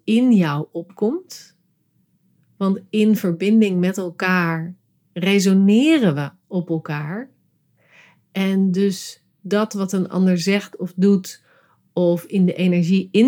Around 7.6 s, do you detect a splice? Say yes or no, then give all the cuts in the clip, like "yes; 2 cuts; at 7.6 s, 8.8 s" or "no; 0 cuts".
no; 0 cuts